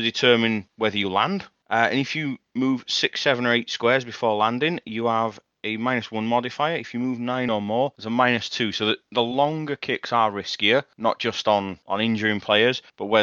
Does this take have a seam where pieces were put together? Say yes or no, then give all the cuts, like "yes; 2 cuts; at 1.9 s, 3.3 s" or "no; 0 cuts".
no; 0 cuts